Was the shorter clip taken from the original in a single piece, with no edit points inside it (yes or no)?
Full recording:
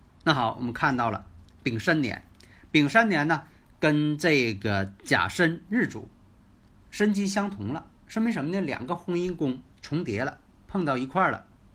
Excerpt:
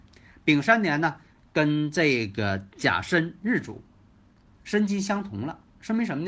yes